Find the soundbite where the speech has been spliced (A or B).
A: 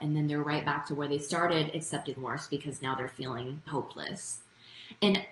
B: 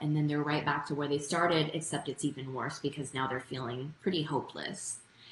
A